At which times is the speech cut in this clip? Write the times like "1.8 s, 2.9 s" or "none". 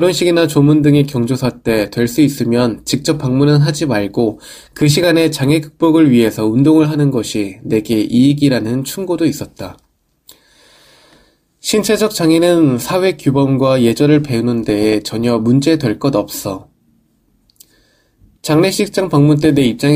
none